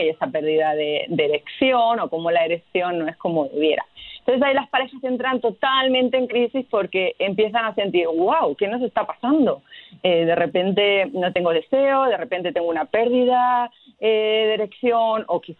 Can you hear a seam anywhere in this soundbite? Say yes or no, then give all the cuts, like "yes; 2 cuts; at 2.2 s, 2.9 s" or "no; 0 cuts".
no; 0 cuts